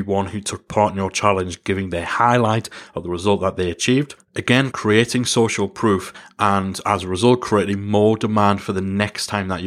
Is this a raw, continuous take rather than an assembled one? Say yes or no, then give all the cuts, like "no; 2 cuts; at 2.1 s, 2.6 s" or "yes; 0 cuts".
no; 1 cut; at 4.7 s